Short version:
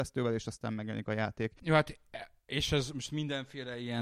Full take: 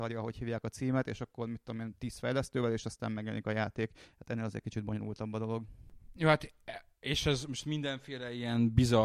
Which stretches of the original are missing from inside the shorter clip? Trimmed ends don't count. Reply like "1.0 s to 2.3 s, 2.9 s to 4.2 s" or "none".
4.0 s to 6.1 s